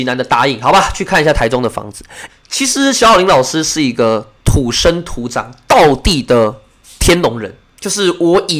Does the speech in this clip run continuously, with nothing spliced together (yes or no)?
no